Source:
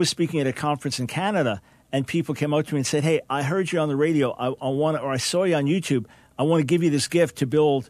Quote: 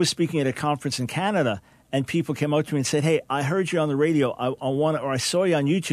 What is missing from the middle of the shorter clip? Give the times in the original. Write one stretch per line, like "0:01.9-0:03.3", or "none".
none